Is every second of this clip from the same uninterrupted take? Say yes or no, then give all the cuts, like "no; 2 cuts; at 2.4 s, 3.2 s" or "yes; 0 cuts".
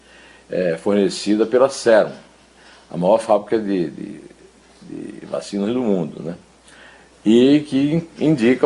yes; 0 cuts